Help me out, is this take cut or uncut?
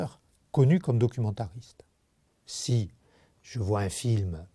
cut